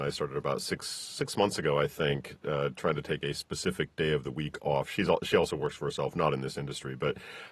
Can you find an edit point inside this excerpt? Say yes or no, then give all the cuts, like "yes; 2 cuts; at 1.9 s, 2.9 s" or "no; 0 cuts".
no; 0 cuts